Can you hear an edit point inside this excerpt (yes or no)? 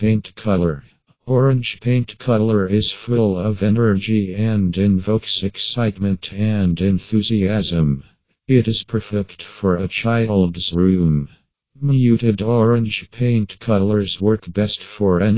no